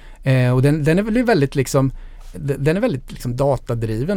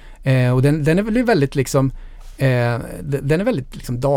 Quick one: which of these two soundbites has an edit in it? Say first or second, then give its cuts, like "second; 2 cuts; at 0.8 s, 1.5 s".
first; 1 cut; at 2.3 s